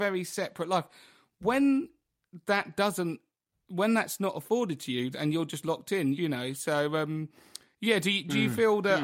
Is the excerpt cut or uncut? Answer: cut